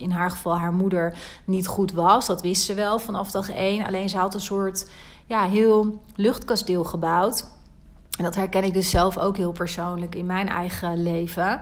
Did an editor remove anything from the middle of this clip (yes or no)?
no